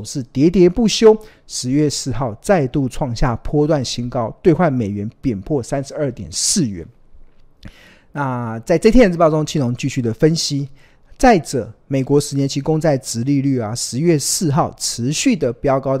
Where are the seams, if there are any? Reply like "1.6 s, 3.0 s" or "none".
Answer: none